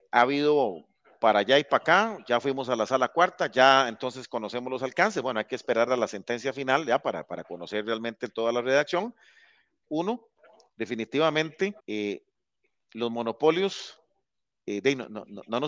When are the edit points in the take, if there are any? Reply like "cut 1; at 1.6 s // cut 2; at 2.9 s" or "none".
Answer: cut 1; at 9.8 s // cut 2; at 11.8 s